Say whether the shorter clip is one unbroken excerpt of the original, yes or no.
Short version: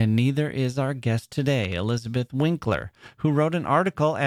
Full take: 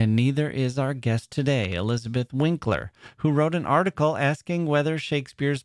yes